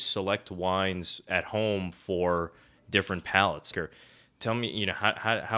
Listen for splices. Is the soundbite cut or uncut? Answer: cut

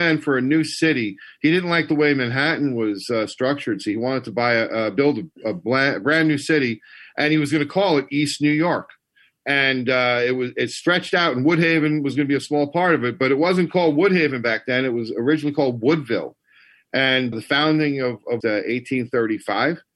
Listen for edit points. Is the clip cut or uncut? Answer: cut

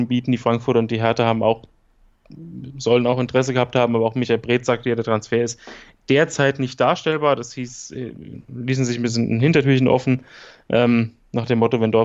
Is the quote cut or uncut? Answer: uncut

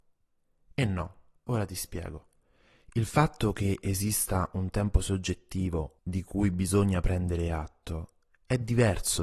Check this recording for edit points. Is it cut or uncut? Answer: cut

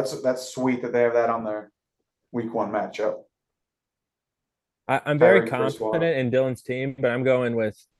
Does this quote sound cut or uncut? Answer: uncut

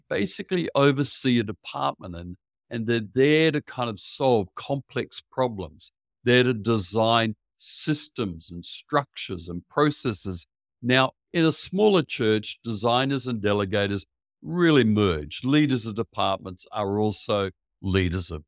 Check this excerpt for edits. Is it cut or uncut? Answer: uncut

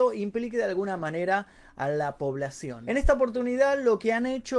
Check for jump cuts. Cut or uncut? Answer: uncut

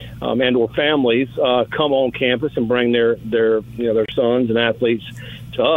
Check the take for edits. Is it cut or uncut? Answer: uncut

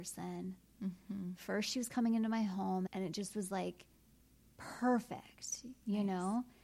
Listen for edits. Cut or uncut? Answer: cut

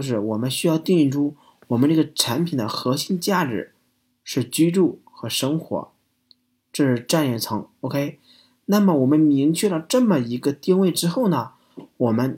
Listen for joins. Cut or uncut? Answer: uncut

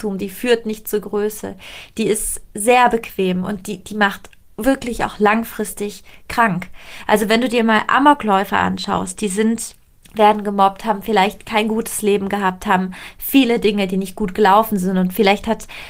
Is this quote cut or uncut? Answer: uncut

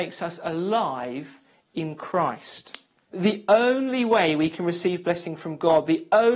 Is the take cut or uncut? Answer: cut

